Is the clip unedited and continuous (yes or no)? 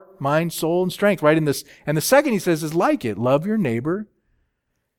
yes